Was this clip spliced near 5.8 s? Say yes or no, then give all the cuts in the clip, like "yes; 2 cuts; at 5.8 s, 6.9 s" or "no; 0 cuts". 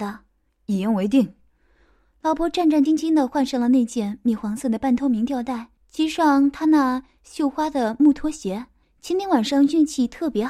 yes; 3 cuts; at 2.9 s, 5.8 s, 8.8 s